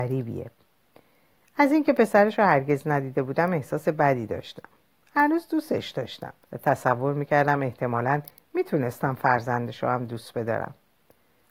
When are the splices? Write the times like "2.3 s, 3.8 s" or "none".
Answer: 6.4 s